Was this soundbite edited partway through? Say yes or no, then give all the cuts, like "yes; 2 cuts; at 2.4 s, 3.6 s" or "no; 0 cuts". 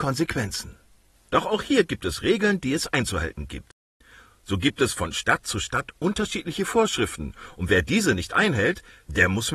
yes; 1 cut; at 1.3 s